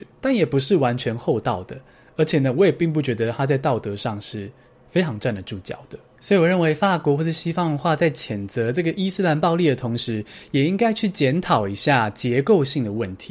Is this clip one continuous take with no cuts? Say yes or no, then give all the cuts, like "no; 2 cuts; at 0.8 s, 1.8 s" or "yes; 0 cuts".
yes; 0 cuts